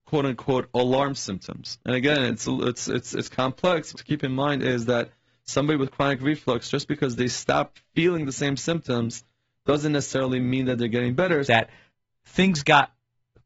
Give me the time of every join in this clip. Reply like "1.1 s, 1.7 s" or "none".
1.8 s, 3.9 s, 11.4 s